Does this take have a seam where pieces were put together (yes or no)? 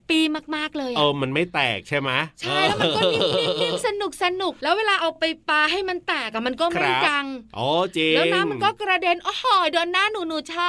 no